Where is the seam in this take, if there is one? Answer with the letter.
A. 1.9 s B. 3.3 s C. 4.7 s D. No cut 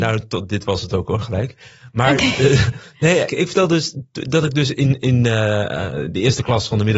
B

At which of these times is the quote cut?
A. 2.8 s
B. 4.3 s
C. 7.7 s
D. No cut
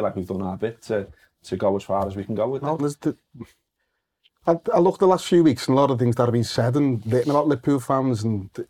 A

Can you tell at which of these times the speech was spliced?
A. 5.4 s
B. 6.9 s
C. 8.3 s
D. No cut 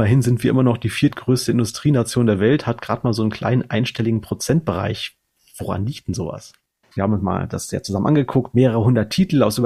B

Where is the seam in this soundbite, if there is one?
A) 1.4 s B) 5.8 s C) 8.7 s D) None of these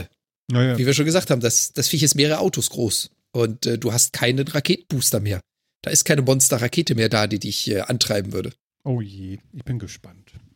C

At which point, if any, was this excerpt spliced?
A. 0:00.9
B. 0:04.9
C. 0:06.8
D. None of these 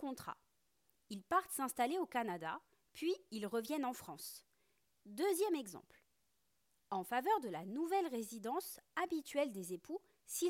B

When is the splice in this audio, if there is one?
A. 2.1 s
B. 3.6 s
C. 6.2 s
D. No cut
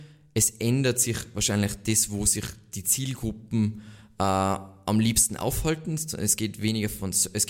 D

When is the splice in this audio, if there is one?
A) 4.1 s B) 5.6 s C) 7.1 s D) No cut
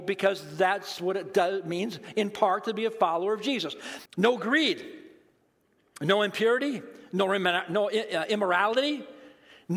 A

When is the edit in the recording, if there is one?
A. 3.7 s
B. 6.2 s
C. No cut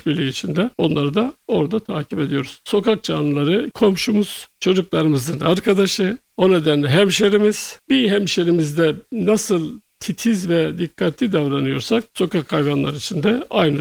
A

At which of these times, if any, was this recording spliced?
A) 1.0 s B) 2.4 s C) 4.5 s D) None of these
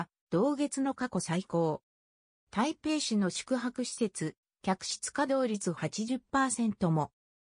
C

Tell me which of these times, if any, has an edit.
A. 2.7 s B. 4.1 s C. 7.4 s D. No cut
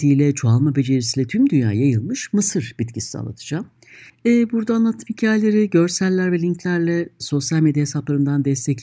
B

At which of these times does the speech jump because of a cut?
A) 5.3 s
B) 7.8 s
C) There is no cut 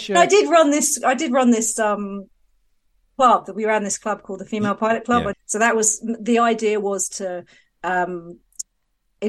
A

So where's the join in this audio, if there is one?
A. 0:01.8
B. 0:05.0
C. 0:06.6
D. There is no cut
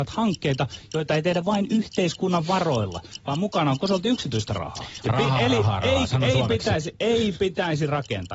B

